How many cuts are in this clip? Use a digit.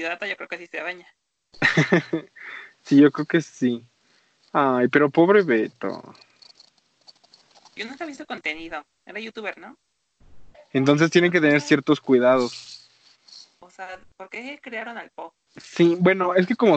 2